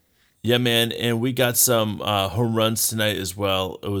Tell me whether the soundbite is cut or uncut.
uncut